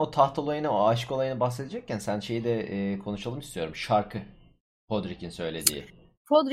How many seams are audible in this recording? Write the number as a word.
zero